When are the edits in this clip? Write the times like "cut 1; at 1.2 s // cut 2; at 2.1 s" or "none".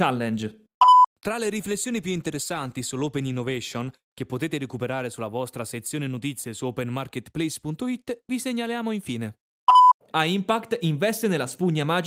cut 1; at 10.1 s

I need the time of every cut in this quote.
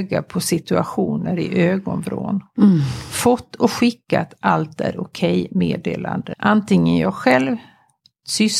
cut 1; at 6.3 s

